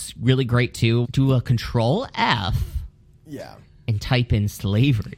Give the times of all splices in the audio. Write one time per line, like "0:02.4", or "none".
0:01.0